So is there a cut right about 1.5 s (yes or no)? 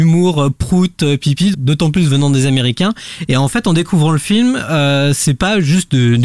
yes